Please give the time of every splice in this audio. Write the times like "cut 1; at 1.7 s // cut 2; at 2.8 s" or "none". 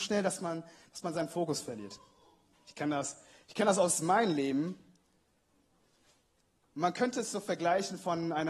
cut 1; at 2.5 s // cut 2; at 6.6 s